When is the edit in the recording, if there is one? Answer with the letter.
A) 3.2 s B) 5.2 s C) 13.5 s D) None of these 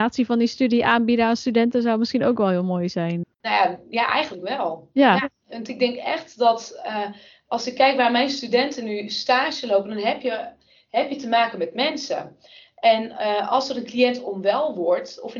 A